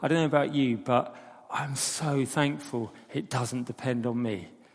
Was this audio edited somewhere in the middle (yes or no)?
no